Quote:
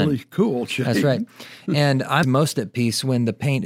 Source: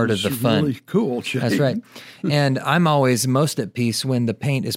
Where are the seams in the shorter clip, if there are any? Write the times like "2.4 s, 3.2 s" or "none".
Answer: 2.2 s